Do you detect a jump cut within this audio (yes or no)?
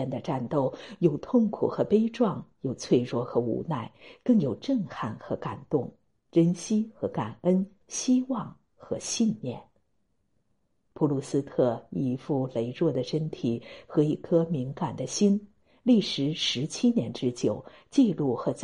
no